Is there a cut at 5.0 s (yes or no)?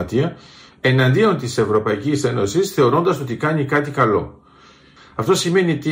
yes